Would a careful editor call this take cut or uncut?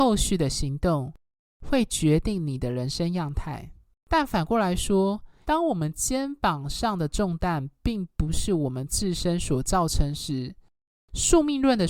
cut